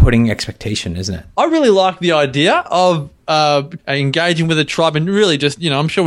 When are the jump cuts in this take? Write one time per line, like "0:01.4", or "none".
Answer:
0:01.3
0:03.8